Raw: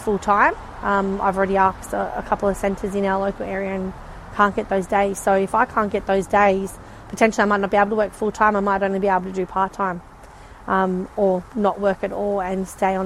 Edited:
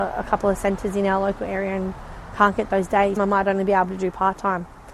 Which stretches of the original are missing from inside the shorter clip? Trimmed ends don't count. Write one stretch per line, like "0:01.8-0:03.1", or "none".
0:05.2-0:08.5